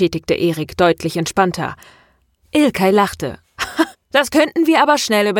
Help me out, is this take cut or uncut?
cut